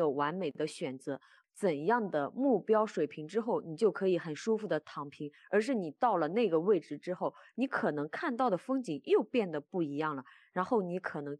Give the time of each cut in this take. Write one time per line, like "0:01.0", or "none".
0:01.4